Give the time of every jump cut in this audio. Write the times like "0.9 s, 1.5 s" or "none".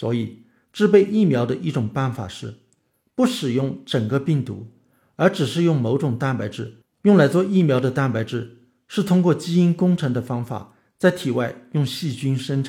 6.8 s